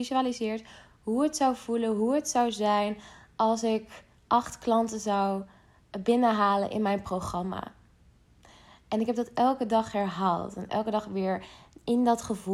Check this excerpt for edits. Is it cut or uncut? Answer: uncut